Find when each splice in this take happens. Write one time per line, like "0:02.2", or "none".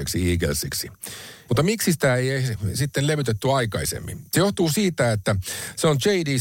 0:01.5